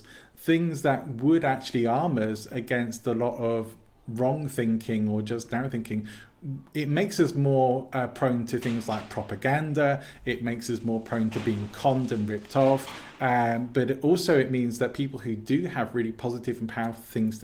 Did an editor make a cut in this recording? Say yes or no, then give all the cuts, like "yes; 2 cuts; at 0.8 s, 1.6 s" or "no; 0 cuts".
no; 0 cuts